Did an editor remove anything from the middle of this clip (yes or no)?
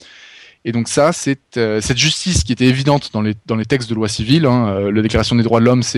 no